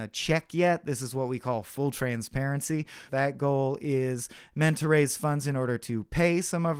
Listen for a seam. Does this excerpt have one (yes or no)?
yes